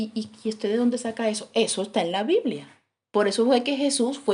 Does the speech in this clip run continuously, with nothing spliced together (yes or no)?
yes